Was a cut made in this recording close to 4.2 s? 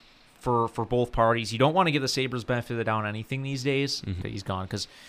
yes; 1 cut; at 4.2 s

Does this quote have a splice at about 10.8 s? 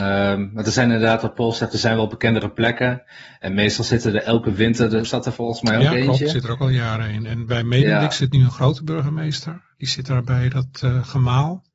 no; 1 cut; at 5.0 s

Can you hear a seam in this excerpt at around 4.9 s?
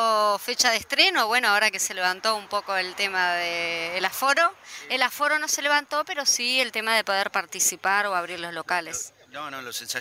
no; 0 cuts

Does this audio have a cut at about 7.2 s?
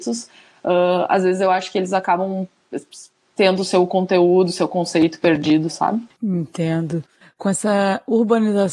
yes; 1 cut; at 7.2 s

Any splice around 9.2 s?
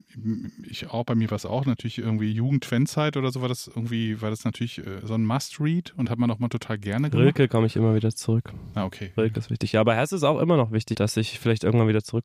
yes; 2 cuts; at 9.2 s, 10.9 s

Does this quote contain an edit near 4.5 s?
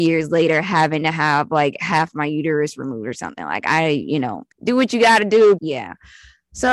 yes; 2 cuts; at 4.5 s, 5.6 s

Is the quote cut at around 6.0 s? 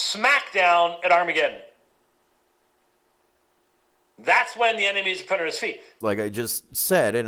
yes; 1 cut; at 6.0 s

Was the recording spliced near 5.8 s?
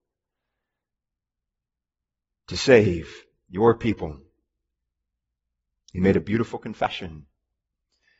no; 0 cuts

